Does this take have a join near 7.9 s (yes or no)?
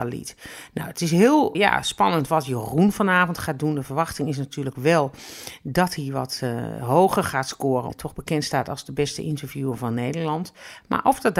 yes